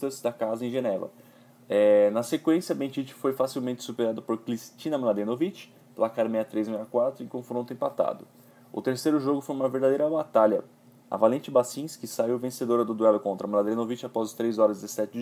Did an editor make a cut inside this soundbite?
no; 0 cuts

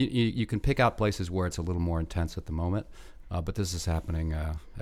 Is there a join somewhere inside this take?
yes; 1 cut; at 3.2 s

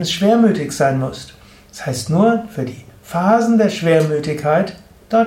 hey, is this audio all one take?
yes; 0 cuts

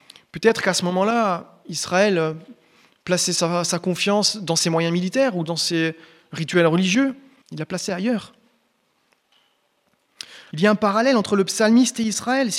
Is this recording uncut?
no; 2 cuts; at 7.4 s, 10.5 s

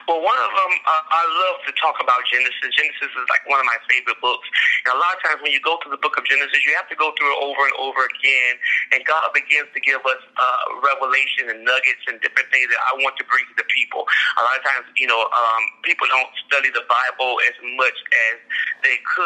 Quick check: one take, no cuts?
yes; 0 cuts

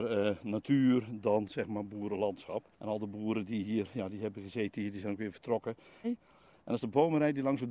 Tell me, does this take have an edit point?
yes; 2 cuts; at 2.7 s, 6.0 s

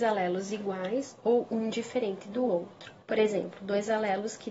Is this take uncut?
no; 1 cut; at 3.0 s

